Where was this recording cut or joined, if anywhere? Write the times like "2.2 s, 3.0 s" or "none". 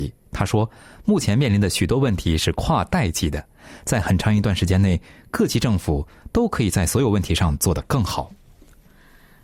none